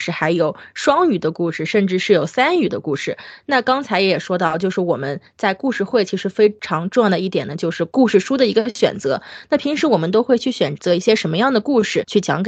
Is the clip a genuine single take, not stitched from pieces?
yes; 0 cuts

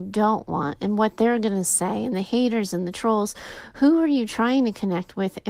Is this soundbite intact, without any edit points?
yes; 0 cuts

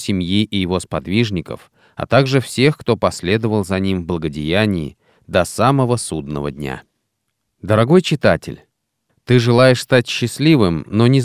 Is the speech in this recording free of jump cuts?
yes; 0 cuts

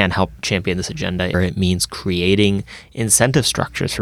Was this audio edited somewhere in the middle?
yes; 1 cut; at 1.3 s

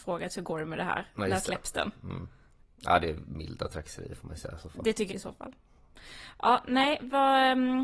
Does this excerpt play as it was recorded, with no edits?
no; 1 cut; at 5.1 s

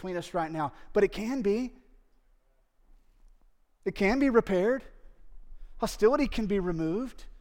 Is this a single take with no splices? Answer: yes; 0 cuts

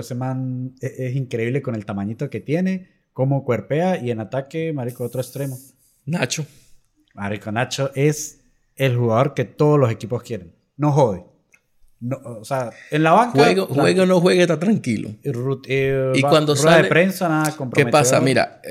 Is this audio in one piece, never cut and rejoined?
yes; 0 cuts

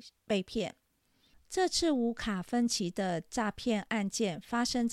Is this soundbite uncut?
no; 1 cut; at 1.3 s

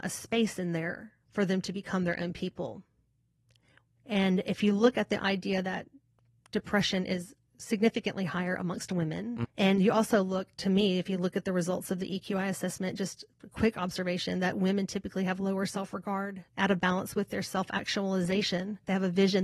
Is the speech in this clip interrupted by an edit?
yes; 2 cuts; at 9.4 s, 16.5 s

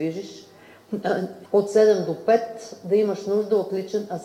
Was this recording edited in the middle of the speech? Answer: yes; 1 cut; at 1.4 s

